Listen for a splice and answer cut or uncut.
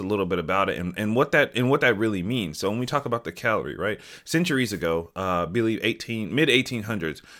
uncut